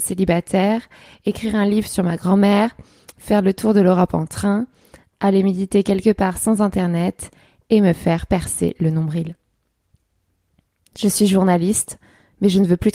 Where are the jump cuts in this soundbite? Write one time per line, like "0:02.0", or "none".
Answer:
none